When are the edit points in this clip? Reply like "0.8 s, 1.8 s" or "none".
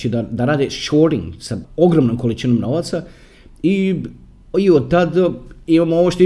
1.6 s